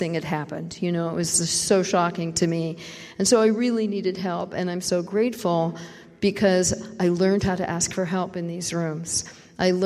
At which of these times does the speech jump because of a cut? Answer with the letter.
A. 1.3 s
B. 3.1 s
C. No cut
C